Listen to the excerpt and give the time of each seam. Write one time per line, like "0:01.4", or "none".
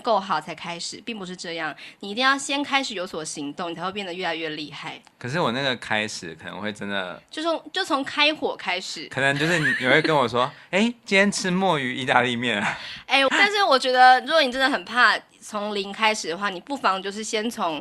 0:13.3